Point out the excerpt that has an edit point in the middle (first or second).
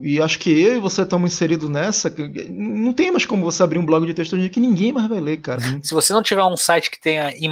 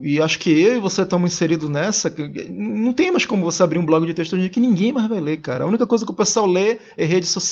first